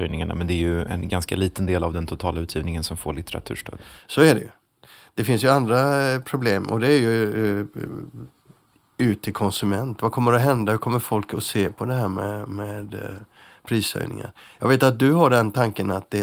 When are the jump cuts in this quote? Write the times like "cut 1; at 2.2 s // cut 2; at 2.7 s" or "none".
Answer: none